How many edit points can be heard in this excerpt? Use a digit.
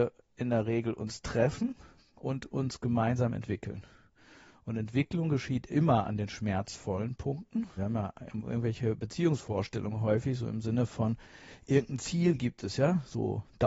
1